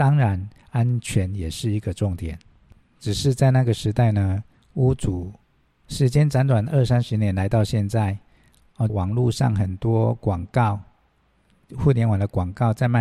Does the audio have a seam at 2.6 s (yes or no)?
no